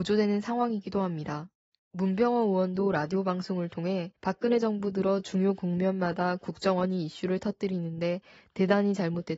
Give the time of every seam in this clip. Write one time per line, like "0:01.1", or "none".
0:01.8
0:04.2